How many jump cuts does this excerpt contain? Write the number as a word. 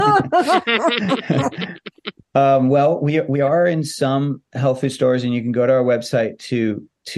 zero